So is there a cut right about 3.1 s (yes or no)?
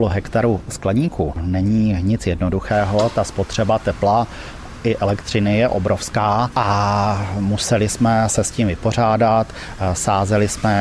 no